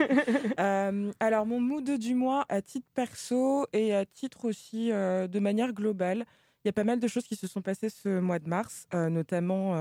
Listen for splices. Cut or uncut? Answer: cut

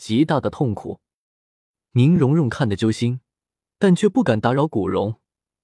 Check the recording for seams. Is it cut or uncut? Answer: uncut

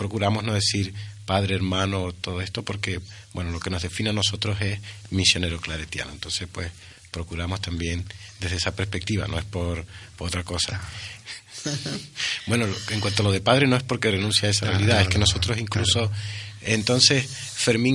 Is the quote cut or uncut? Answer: cut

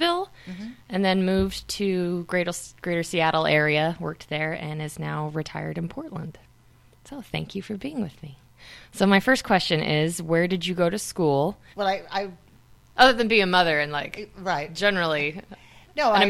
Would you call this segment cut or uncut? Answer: cut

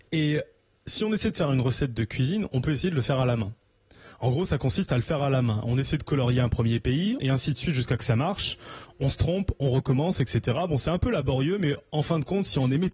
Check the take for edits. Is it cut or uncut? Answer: cut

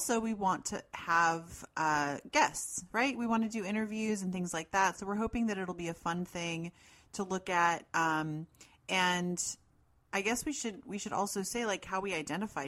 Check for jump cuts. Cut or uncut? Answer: uncut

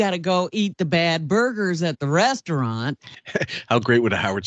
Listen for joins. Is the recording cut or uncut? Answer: uncut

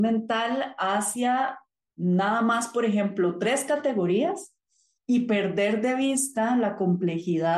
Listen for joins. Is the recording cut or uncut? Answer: uncut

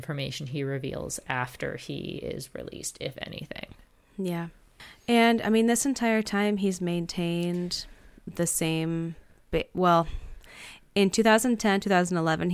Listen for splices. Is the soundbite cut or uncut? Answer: uncut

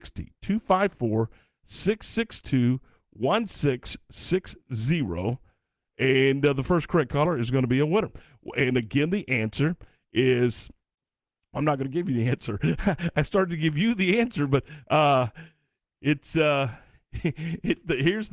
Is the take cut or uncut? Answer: uncut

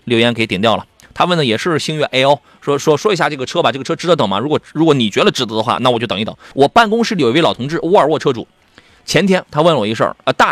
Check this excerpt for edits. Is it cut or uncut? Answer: cut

